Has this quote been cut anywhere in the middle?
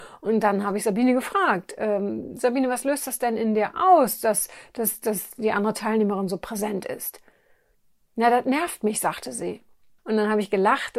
yes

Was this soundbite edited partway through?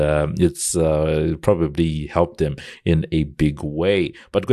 no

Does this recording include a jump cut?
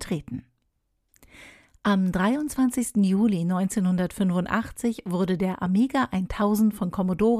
no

